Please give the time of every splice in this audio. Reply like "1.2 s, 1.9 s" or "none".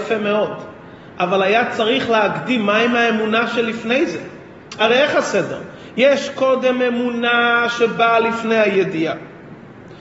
none